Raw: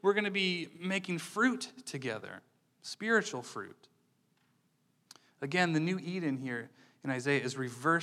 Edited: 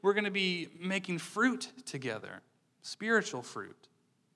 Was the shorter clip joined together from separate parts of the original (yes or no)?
no